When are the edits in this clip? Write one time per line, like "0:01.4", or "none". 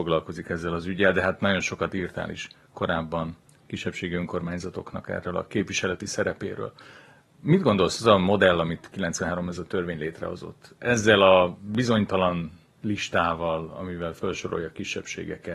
0:12.7